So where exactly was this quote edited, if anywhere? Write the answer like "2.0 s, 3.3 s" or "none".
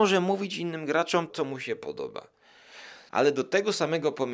1.3 s, 3.1 s